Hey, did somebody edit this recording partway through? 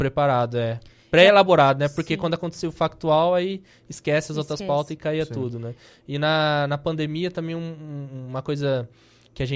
no; 0 cuts

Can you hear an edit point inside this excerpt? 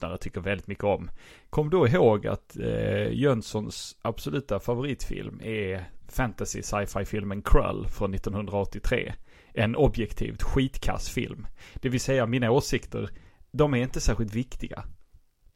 no; 0 cuts

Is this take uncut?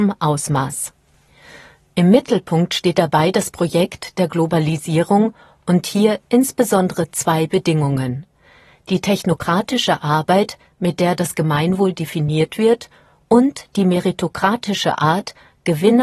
yes; 0 cuts

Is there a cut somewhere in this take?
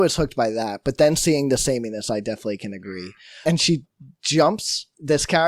yes; 1 cut; at 3.4 s

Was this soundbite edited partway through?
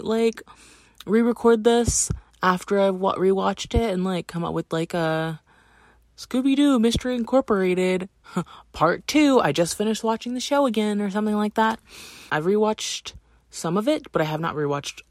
yes; 1 cut; at 12.3 s

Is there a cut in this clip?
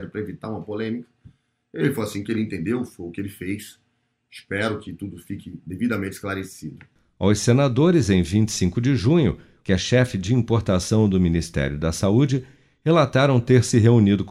yes; 1 cut; at 9.6 s

